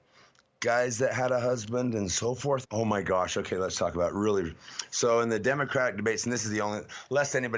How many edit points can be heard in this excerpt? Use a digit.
1